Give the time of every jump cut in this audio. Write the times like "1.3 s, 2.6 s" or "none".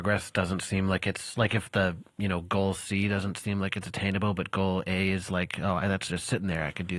none